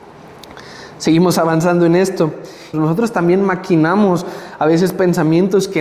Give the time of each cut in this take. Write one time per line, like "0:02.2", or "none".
0:02.7